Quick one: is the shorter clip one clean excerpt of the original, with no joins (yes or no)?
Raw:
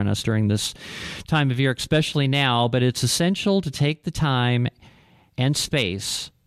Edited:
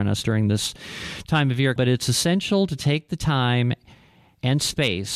no